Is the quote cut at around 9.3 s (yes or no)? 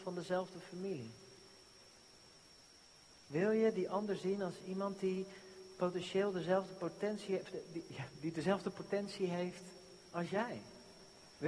no